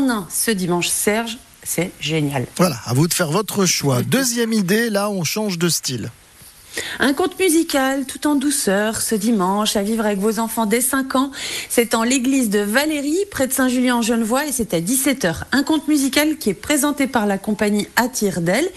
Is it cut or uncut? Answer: uncut